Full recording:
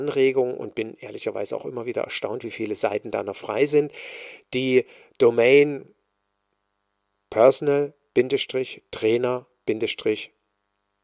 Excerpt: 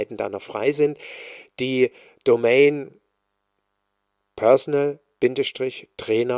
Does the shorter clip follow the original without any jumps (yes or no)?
yes